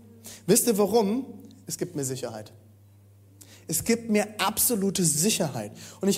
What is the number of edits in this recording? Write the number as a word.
zero